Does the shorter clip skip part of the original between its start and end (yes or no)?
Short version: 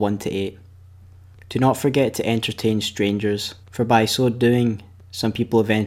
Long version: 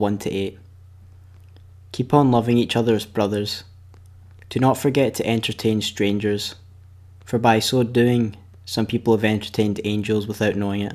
yes